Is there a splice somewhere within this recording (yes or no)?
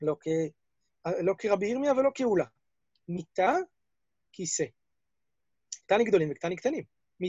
yes